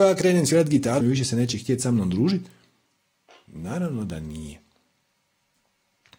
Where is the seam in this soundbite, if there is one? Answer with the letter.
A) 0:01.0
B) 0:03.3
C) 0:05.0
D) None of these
A